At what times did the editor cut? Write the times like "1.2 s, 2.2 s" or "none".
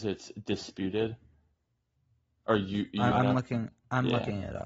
3.1 s